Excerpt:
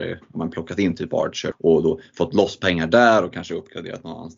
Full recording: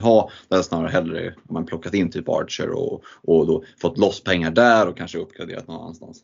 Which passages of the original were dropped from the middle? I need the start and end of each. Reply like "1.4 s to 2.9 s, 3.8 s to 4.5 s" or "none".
2.7 s to 3.2 s